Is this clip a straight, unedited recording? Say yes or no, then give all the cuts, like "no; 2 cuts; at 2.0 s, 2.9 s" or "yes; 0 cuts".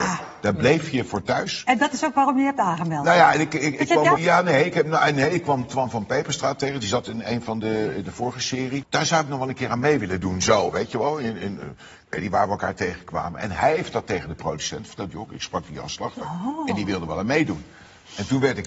no; 2 cuts; at 4.2 s, 8.8 s